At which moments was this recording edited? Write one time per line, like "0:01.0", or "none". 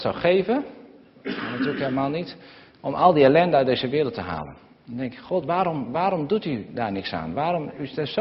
none

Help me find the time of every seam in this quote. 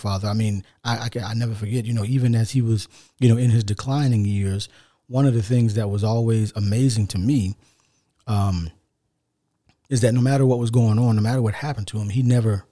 none

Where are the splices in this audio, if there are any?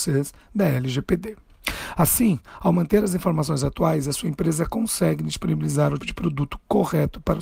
0:06.0

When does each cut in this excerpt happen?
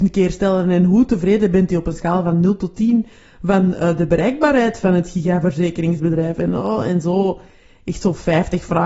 none

